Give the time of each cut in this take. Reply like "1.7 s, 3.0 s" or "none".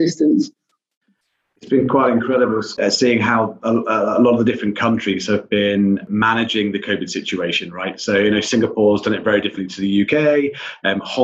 none